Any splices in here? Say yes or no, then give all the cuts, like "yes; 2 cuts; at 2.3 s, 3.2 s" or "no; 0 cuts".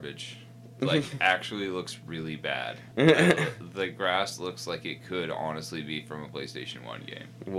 no; 0 cuts